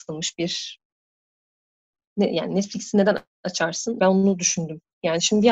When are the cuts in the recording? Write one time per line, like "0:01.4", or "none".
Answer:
0:04.0